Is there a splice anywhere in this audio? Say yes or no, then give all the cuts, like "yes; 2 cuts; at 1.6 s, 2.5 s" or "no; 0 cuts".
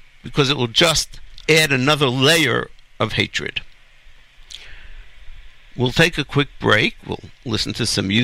no; 0 cuts